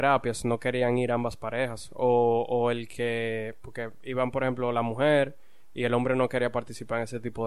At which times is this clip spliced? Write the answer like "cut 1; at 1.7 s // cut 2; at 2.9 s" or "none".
none